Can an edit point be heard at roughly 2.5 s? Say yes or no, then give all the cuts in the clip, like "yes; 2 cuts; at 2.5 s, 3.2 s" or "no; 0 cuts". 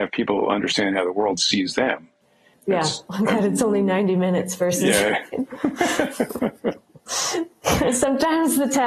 yes; 1 cut; at 2.5 s